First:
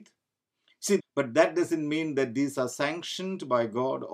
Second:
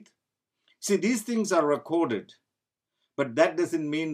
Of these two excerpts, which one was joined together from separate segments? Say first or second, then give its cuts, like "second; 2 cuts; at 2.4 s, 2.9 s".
first; 1 cut; at 1.0 s